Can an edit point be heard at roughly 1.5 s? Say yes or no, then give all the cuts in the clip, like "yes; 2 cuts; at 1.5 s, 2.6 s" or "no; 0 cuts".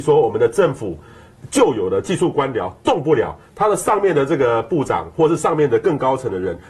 no; 0 cuts